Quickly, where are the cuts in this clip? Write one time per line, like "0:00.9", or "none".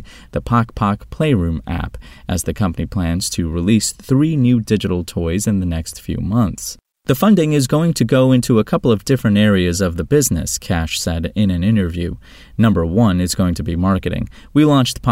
none